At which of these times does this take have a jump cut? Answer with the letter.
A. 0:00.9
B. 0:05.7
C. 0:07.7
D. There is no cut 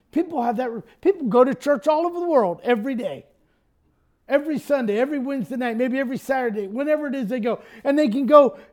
D